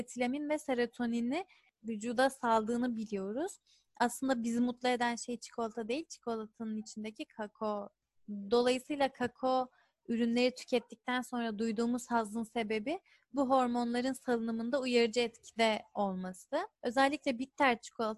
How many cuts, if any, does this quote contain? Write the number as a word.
one